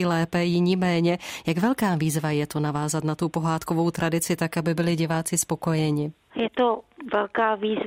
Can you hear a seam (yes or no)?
no